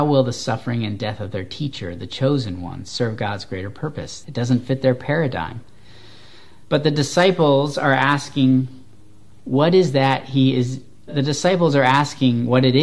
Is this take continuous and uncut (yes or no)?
no